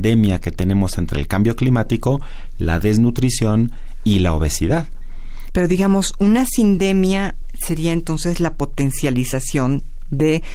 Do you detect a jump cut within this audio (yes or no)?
yes